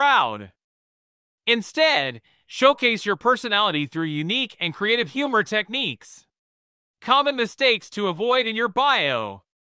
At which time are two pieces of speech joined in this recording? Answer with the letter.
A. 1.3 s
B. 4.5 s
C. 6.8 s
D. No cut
C